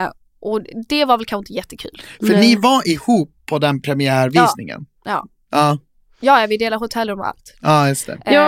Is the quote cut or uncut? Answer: uncut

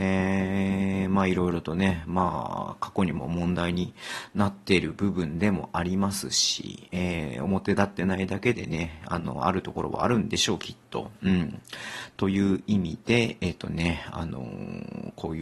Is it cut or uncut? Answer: uncut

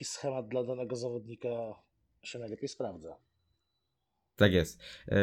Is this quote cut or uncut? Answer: uncut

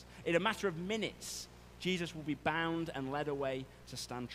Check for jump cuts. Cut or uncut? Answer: cut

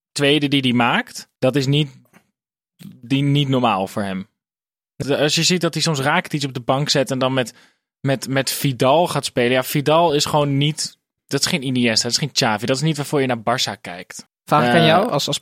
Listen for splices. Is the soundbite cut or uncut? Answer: cut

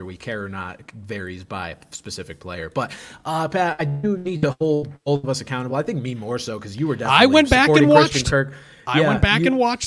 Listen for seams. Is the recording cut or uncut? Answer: uncut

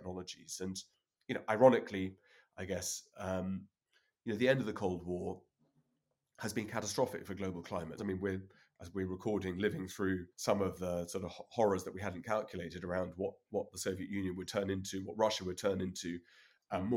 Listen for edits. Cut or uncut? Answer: cut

